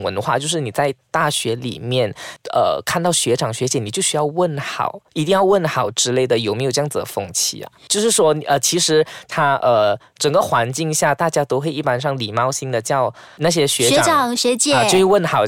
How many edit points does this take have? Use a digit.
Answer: 2